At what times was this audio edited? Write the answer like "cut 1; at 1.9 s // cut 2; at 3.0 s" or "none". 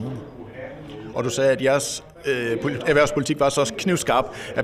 cut 1; at 1.1 s